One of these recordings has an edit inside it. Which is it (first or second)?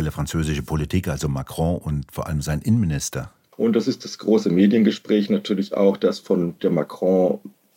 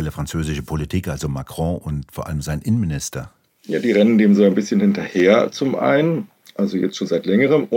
first